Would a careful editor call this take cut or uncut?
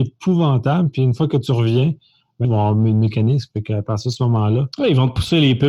cut